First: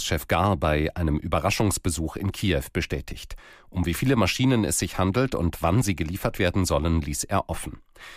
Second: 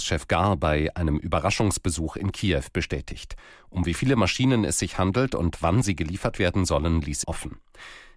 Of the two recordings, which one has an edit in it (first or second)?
second